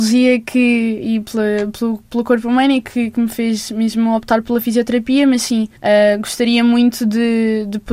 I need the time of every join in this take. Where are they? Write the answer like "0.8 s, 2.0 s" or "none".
5.8 s